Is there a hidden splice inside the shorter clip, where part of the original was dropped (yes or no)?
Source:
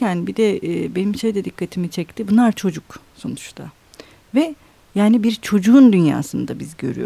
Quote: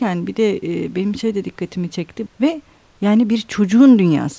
yes